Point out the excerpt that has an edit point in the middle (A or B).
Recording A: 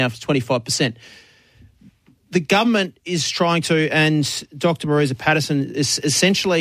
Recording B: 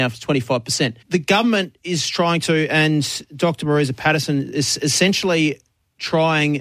B